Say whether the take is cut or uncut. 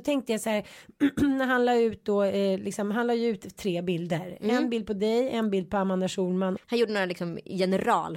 cut